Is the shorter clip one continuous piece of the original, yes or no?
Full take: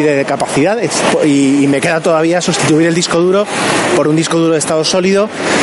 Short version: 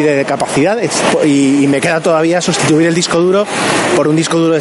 yes